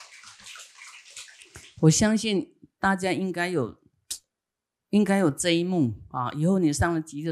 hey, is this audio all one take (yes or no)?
yes